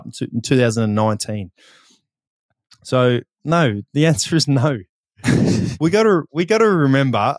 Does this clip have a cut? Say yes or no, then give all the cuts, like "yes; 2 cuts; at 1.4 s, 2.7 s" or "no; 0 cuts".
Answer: no; 0 cuts